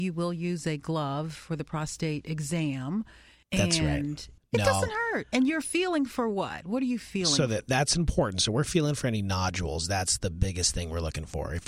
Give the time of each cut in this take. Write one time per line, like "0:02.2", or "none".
none